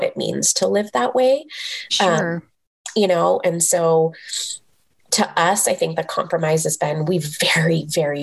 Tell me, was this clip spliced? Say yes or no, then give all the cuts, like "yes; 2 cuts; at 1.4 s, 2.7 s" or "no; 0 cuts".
no; 0 cuts